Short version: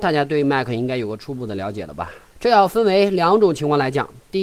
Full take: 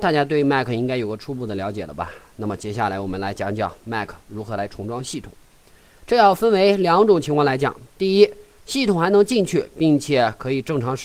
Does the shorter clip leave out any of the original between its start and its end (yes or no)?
yes